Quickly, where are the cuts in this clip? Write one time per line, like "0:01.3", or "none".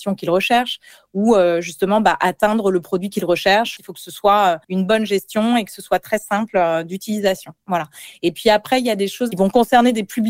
0:04.6
0:07.6